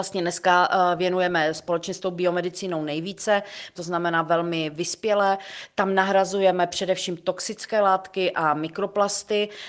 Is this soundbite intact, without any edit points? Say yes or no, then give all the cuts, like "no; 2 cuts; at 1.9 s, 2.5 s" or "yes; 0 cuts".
no; 1 cut; at 3.7 s